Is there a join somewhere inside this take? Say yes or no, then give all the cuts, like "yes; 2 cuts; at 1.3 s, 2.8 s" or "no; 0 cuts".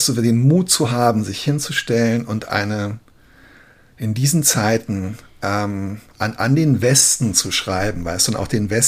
no; 0 cuts